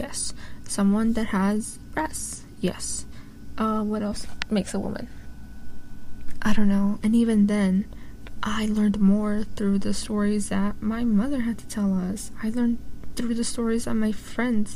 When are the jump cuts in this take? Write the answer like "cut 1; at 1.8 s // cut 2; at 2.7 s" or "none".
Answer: cut 1; at 7.0 s